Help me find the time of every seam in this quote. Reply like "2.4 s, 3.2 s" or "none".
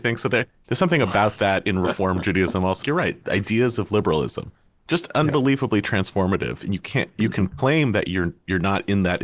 2.8 s